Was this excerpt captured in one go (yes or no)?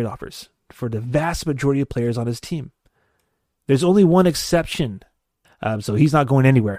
no